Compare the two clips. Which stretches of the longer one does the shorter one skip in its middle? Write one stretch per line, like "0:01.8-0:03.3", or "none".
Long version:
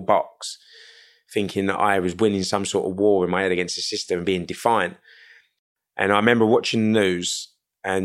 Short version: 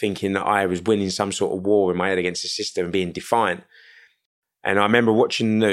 none